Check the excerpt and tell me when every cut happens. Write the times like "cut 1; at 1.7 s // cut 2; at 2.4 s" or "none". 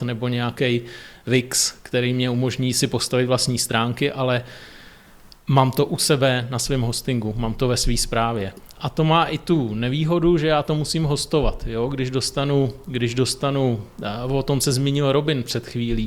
none